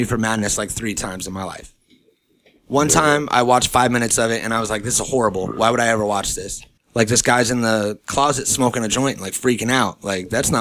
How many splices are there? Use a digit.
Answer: 1